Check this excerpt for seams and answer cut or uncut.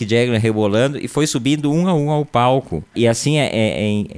cut